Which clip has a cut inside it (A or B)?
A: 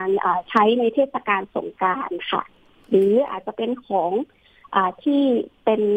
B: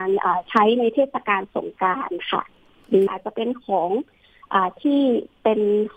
B